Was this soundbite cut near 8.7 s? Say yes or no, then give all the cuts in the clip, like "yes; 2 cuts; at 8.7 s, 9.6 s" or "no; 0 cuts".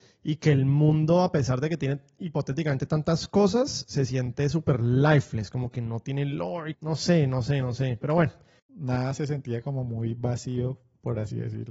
yes; 2 cuts; at 6.7 s, 8.7 s